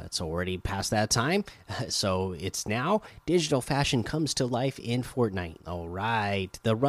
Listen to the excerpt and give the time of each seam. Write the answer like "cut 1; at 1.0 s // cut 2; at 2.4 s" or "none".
cut 1; at 5.6 s